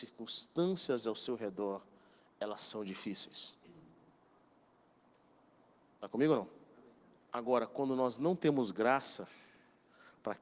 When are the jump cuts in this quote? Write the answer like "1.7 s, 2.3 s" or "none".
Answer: 7.2 s

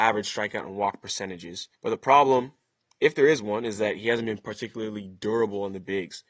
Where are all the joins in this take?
1.8 s

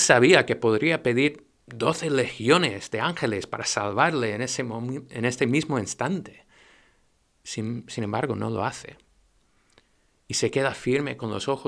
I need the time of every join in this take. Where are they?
none

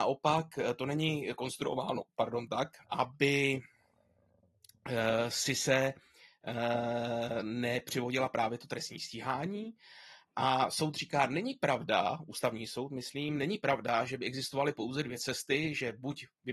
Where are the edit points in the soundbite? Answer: 2.8 s

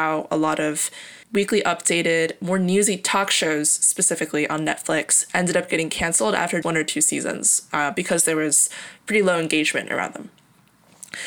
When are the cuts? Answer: 1.2 s, 6.6 s

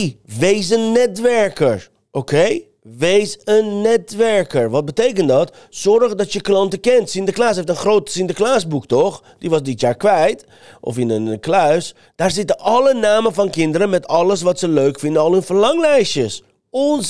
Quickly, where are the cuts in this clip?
none

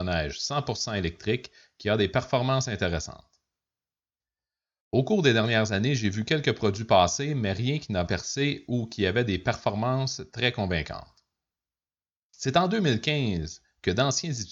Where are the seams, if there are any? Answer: 8.1 s

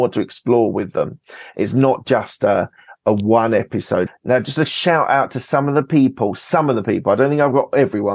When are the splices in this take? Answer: 4.1 s

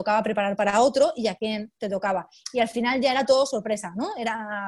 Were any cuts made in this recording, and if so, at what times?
none

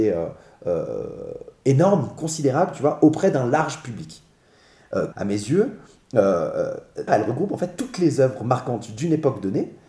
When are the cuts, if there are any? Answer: 5.1 s, 7.1 s

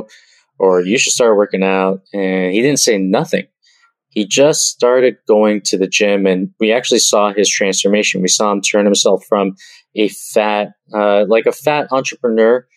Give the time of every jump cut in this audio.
none

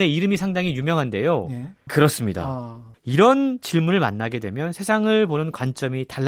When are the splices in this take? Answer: 1.9 s, 2.9 s

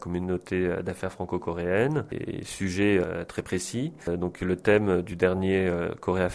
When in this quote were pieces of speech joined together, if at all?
none

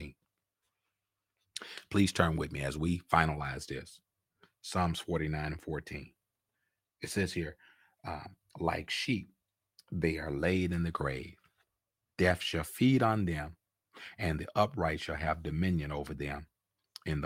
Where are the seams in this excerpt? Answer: none

